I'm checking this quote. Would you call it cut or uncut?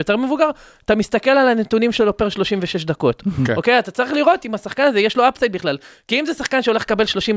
uncut